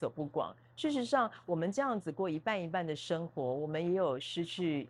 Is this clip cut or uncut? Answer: uncut